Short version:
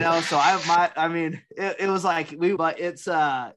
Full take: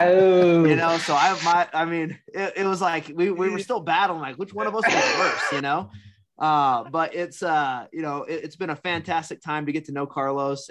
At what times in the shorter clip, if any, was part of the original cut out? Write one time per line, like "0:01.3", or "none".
0:02.6